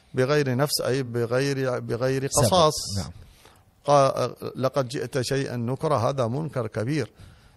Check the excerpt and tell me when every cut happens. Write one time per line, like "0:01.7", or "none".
none